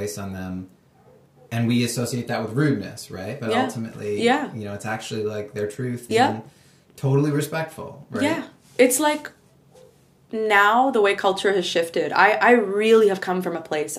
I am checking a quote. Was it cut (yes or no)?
yes